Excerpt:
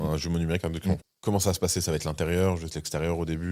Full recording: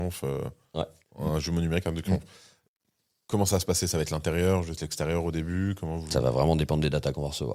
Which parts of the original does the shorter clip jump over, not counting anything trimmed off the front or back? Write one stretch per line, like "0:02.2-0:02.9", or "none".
0:02.2-0:03.1